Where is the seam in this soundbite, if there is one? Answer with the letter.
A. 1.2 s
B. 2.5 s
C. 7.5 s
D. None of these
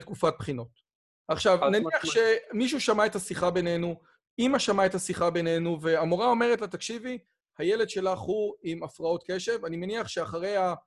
A